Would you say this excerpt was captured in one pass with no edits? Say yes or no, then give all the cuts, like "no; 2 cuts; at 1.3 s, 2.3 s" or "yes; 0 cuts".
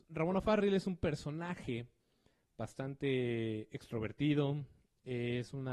yes; 0 cuts